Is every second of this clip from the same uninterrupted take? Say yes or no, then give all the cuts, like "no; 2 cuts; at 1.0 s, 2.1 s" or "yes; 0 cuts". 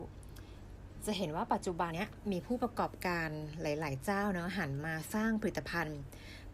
no; 1 cut; at 1.9 s